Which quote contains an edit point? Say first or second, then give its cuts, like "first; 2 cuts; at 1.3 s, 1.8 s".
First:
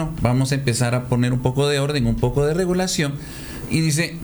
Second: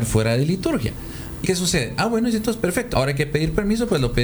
second; 2 cuts; at 1.4 s, 2.9 s